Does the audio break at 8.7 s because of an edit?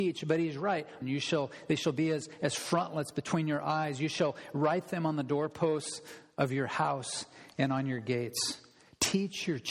no; 1 cut; at 1.0 s

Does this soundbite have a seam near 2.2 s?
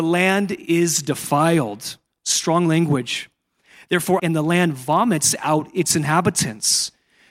no; 1 cut; at 4.2 s

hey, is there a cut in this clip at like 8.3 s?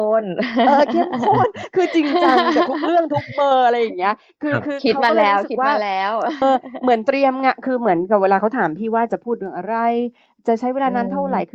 no; 1 cut; at 6.4 s

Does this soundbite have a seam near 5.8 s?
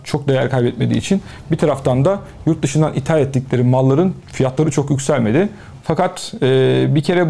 yes; 1 cut; at 5.8 s

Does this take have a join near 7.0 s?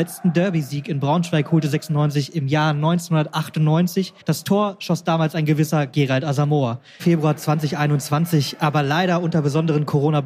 yes; 2 cuts; at 4.2 s, 7.0 s

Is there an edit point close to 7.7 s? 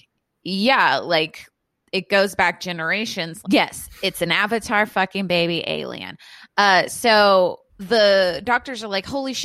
yes; 2 cuts; at 3.4 s, 7.7 s

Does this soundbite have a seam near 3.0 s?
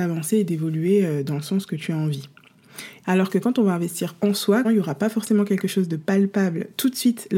yes; 2 cuts; at 3.0 s, 4.6 s

